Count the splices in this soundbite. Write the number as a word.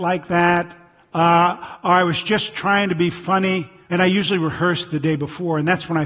one